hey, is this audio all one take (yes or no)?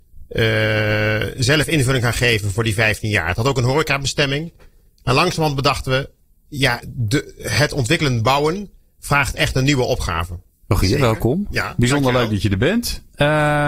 no